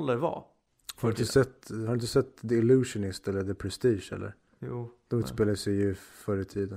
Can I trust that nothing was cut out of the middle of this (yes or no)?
yes